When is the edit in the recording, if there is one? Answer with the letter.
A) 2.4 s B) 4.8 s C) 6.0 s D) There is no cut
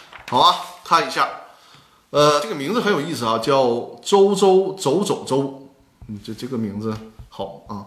D